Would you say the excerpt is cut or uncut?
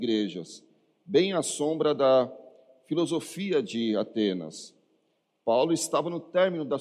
uncut